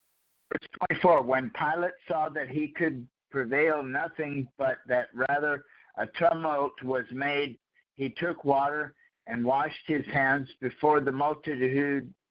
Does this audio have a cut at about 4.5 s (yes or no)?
no